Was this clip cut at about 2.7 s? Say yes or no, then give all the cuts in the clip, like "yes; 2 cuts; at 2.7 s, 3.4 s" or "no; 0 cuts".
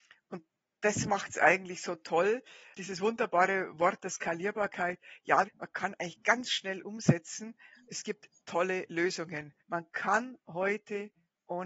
yes; 3 cuts; at 2.7 s, 5.4 s, 9.6 s